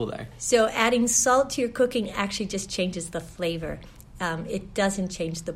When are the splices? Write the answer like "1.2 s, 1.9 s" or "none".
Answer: none